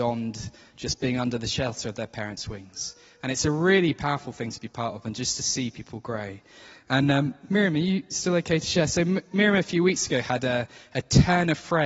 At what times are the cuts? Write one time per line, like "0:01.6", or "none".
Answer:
none